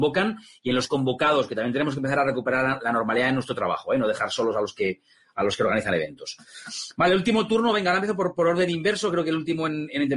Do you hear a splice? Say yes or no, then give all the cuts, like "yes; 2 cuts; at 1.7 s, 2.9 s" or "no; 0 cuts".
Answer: no; 0 cuts